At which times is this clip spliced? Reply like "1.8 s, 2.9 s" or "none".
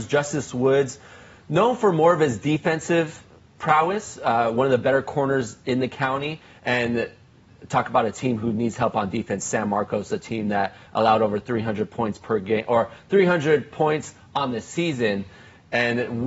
none